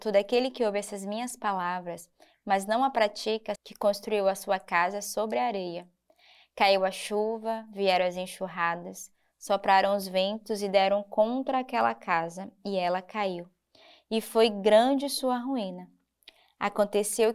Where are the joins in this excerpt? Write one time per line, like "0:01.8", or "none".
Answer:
0:03.5